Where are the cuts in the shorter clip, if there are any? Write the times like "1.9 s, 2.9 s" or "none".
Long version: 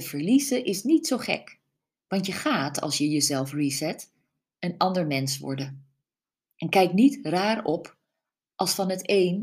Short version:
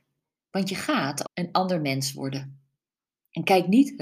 1.2 s